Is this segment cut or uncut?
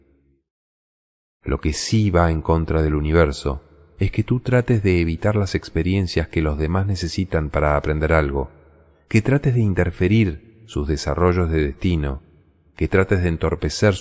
uncut